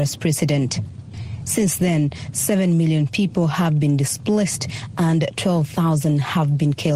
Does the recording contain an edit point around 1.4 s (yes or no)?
yes